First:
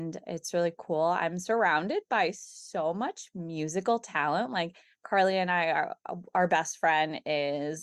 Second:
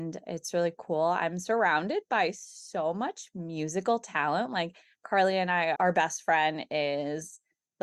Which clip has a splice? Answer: second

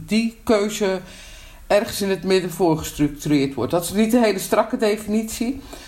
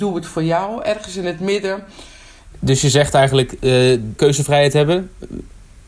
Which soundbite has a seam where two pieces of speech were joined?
second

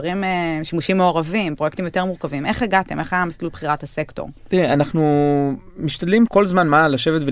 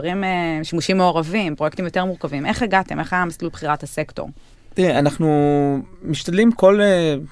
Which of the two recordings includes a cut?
first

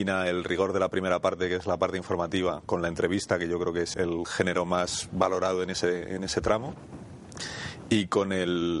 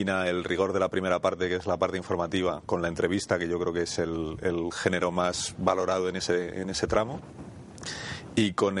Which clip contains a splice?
first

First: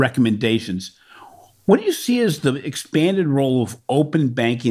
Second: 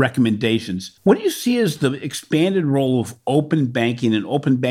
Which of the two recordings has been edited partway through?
second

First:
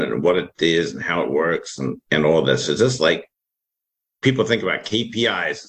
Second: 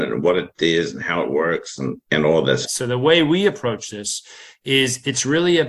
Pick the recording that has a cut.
second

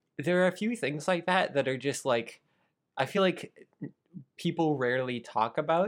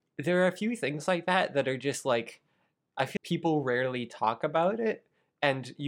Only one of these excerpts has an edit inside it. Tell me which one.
second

